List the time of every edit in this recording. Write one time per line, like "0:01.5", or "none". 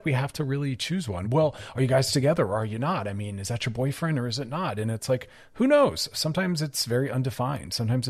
none